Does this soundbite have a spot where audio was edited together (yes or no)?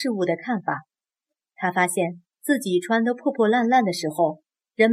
no